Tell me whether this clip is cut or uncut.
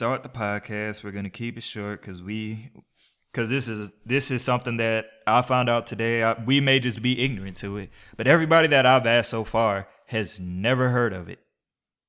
uncut